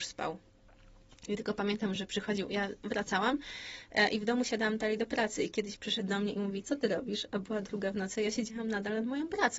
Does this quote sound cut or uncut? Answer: uncut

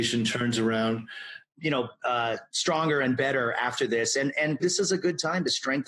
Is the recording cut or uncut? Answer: cut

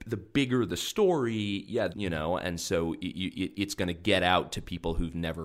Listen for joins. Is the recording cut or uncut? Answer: cut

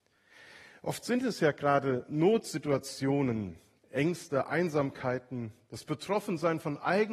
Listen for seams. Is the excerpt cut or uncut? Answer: uncut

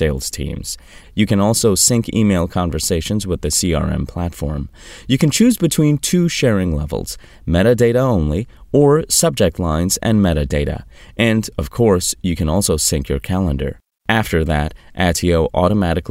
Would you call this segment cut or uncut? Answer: cut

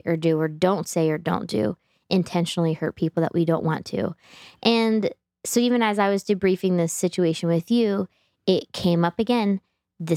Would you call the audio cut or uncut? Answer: uncut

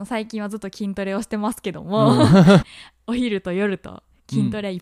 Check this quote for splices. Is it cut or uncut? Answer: cut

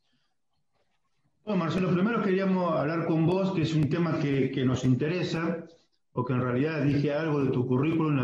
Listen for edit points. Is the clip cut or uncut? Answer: uncut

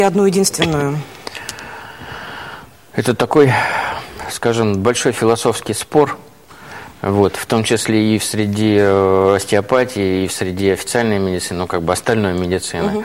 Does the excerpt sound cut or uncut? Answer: uncut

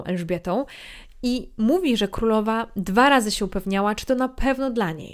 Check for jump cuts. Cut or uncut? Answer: uncut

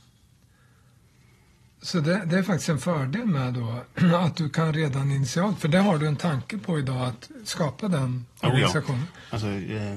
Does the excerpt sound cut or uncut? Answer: uncut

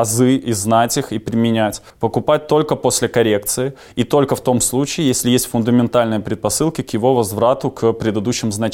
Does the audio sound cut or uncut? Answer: cut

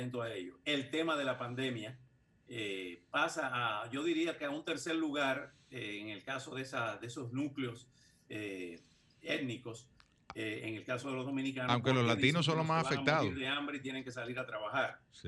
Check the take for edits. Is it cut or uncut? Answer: uncut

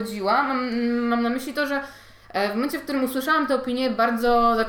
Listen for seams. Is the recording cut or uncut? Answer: uncut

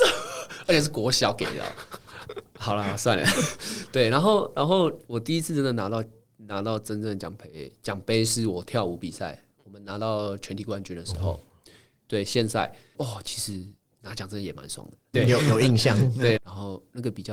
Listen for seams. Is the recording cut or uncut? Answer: cut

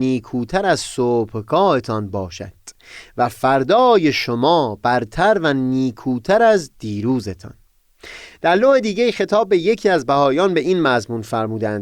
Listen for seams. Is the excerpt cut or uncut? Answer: uncut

